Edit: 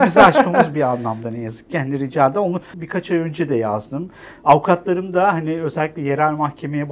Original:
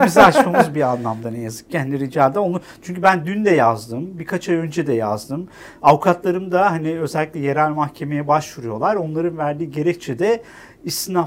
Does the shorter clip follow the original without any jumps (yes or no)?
no